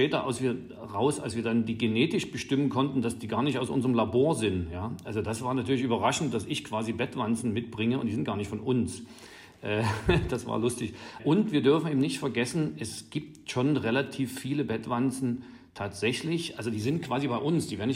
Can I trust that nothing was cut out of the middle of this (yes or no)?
yes